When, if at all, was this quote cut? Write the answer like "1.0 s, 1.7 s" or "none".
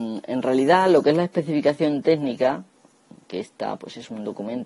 3.2 s